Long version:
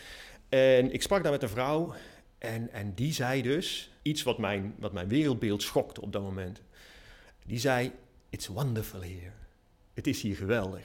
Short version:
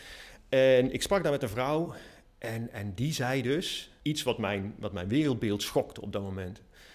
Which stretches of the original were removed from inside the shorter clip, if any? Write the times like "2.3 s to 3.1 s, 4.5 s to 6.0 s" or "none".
none